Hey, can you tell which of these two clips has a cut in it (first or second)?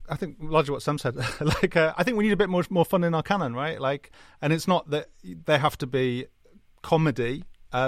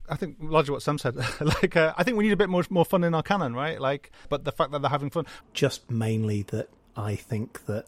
second